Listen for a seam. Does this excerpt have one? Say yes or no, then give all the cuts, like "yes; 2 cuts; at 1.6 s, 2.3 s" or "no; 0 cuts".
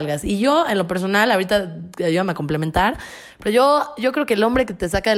no; 0 cuts